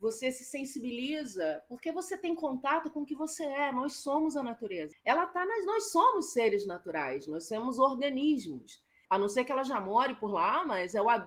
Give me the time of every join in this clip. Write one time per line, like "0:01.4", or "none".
0:04.9
0:09.1